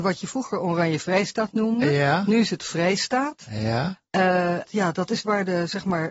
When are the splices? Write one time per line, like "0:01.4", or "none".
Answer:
0:04.6

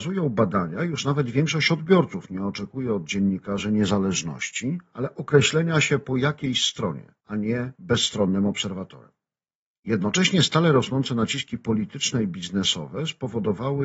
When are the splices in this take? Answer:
0:07.2
0:09.7

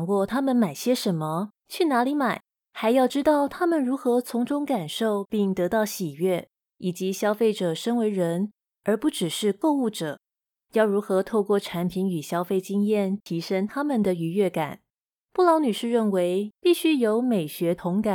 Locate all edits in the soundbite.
0:16.5

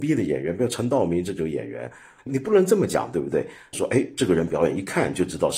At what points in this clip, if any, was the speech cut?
0:02.2
0:03.7

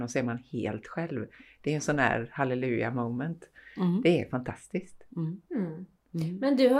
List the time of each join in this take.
0:05.5

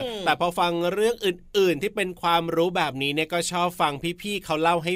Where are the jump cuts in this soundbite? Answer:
none

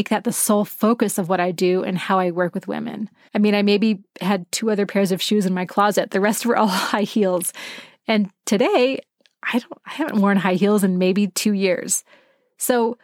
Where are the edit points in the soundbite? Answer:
0:03.3

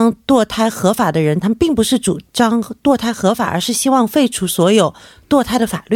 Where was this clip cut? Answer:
0:01.4

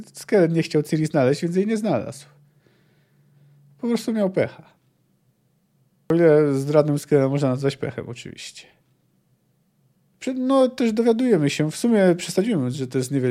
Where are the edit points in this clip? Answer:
none

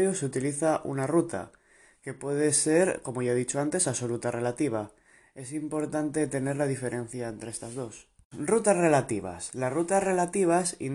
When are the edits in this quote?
0:08.3

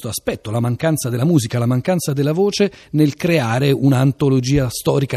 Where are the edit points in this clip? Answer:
none

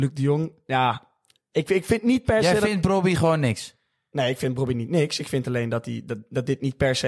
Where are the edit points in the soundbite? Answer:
none

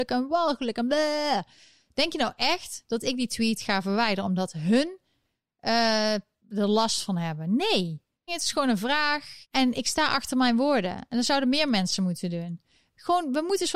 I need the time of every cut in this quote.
0:08.3
0:09.4

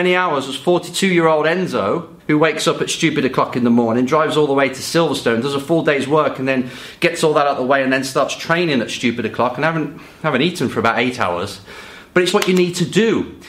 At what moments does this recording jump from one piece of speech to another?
0:02.2
0:12.3

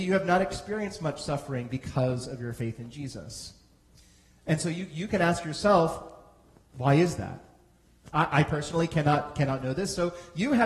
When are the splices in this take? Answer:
none

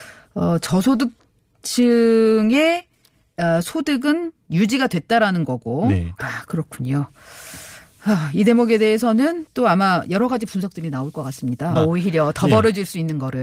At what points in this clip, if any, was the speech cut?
0:06.2
0:11.7

